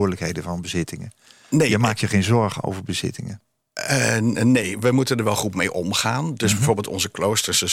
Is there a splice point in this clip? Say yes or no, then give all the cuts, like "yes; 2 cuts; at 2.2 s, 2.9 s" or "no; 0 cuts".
no; 0 cuts